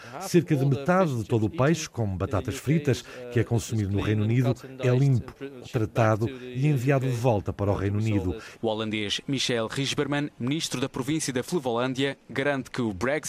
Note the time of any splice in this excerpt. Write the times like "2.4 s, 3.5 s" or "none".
5.6 s, 8.5 s